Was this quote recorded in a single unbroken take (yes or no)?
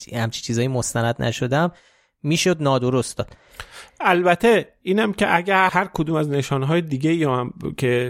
no